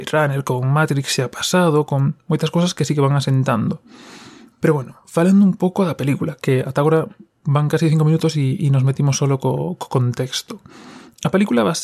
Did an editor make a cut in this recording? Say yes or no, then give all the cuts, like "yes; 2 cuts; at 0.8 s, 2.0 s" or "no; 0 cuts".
yes; 1 cut; at 4.5 s